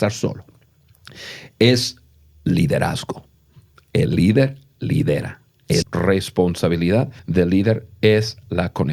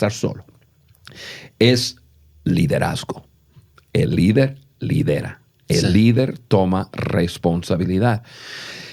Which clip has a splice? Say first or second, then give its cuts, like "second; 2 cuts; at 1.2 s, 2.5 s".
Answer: first; 2 cuts; at 5.8 s, 7.2 s